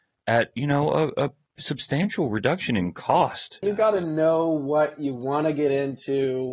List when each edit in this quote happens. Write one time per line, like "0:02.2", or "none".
0:03.6